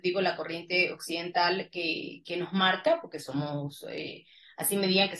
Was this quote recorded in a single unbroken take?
yes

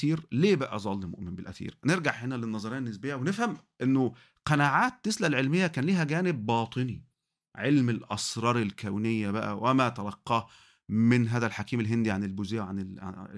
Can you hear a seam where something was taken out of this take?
no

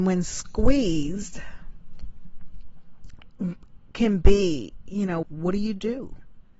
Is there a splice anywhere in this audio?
yes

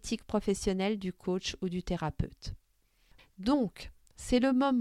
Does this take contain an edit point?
yes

